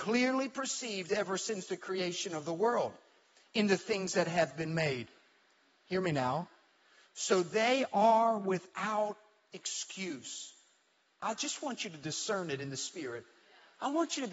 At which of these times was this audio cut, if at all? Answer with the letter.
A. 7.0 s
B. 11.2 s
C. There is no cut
B